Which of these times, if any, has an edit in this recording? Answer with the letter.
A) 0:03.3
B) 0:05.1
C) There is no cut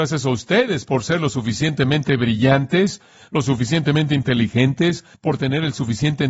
B